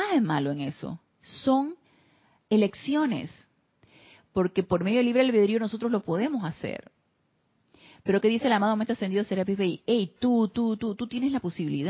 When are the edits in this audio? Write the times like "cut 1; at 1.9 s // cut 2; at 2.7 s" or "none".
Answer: none